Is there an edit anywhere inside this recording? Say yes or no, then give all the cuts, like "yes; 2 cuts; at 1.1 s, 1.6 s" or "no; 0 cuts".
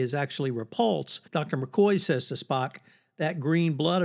yes; 1 cut; at 1.3 s